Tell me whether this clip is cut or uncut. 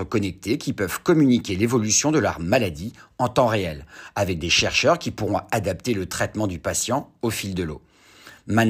uncut